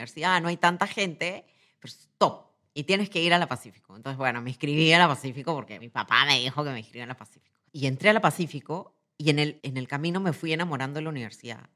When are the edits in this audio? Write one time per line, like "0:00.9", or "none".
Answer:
0:05.8
0:07.7
0:09.6